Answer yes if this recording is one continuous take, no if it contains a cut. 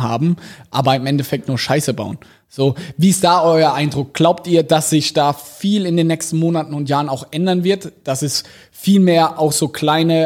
yes